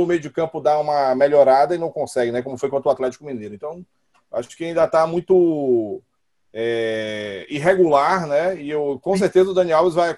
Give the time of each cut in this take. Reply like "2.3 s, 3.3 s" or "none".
none